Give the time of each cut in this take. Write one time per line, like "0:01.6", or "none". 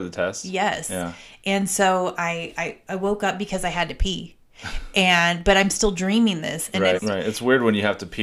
0:07.0